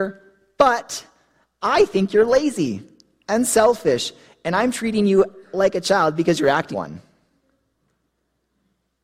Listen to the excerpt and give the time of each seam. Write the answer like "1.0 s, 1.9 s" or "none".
6.7 s

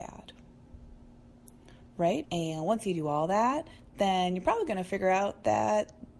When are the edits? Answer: 2.2 s

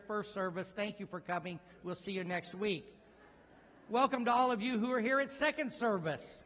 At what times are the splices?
none

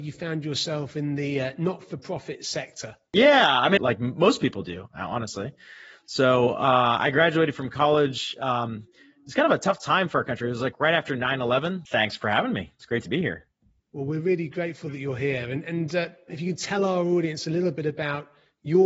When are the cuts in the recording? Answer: 3.8 s, 11.9 s, 16.3 s

